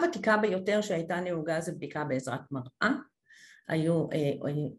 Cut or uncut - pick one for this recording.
uncut